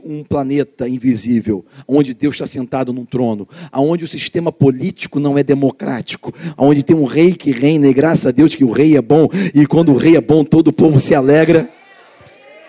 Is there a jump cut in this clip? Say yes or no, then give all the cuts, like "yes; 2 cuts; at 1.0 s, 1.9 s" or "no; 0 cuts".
yes; 1 cut; at 6.6 s